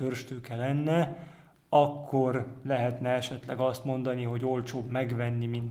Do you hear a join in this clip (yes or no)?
no